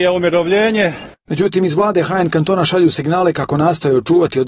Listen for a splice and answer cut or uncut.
uncut